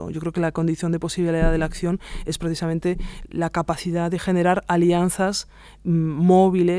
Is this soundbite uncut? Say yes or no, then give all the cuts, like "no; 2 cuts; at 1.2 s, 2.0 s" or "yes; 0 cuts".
yes; 0 cuts